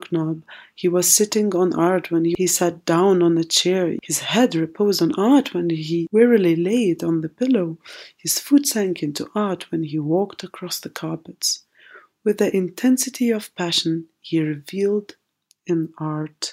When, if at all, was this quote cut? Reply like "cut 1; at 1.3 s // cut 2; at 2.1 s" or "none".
none